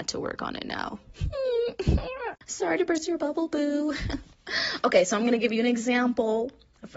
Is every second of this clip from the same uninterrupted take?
yes; 0 cuts

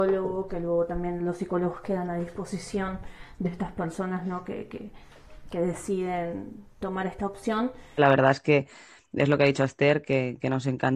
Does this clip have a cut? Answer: yes; 1 cut; at 8.0 s

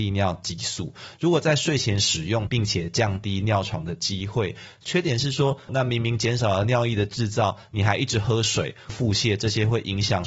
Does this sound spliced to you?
yes; 3 cuts; at 2.5 s, 5.7 s, 8.9 s

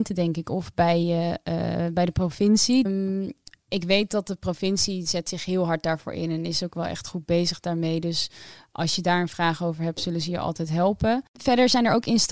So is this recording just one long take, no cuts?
no; 1 cut; at 2.9 s

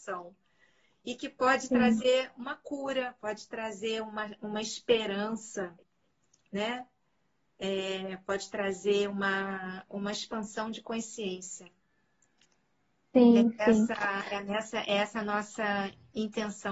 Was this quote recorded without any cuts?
yes; 0 cuts

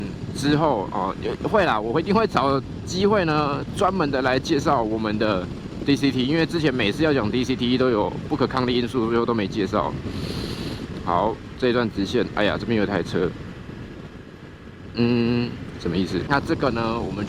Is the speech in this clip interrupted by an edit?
yes; 1 cut; at 16.3 s

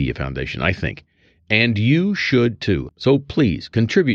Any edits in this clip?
yes; 1 cut; at 2.9 s

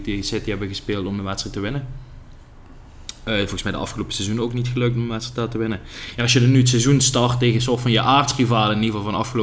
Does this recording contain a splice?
no; 0 cuts

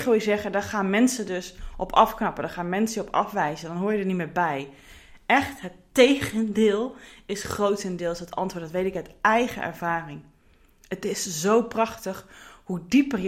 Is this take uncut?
yes; 0 cuts

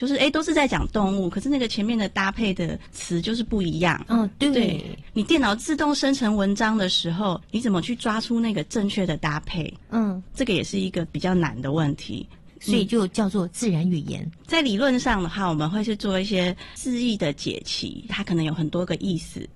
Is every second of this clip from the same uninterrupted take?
no; 3 cuts; at 12.5 s, 14.4 s, 18.1 s

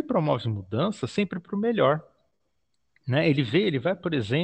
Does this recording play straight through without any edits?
yes; 0 cuts

